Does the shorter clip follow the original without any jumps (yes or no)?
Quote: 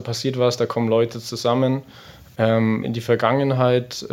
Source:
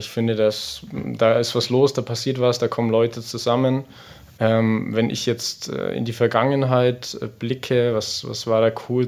no